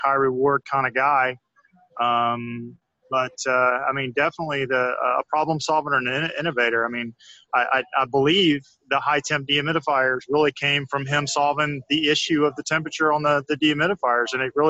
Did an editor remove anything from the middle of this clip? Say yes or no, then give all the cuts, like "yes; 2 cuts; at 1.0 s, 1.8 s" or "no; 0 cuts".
no; 0 cuts